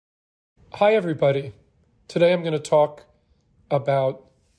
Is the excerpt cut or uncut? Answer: cut